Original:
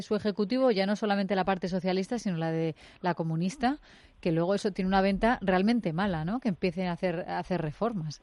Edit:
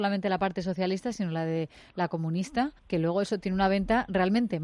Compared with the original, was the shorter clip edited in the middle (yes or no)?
yes